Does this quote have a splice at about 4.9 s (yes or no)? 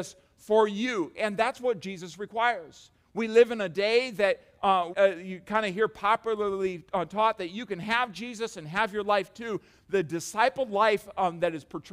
yes